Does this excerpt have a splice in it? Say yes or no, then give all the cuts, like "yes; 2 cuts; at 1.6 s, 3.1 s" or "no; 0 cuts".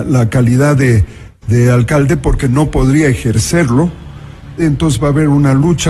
yes; 1 cut; at 4.6 s